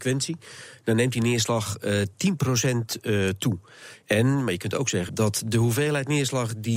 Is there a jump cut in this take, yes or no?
yes